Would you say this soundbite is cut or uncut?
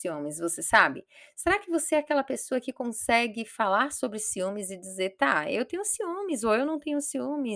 uncut